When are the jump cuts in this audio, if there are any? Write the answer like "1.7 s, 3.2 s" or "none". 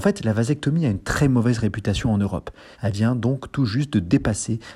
2.7 s

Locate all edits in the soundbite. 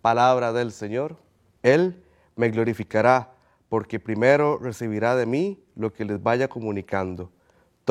1.5 s

